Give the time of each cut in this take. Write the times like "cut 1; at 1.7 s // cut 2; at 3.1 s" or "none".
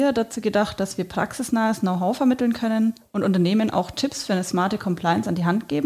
none